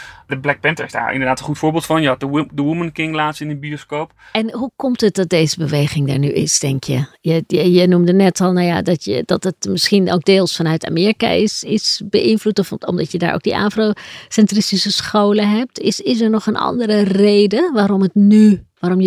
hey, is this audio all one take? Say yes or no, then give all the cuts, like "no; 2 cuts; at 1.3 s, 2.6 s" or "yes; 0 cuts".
yes; 0 cuts